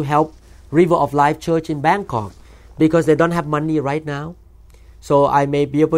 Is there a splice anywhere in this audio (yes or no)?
no